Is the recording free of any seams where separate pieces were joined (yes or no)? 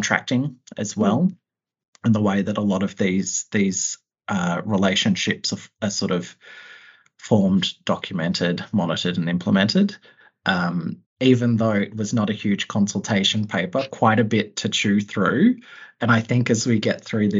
no